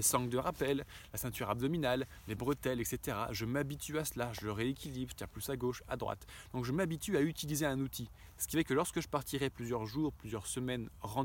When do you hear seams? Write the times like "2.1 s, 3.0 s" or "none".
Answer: none